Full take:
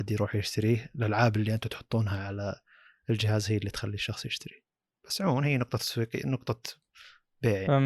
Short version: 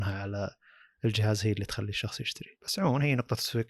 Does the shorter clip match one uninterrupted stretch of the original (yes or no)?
no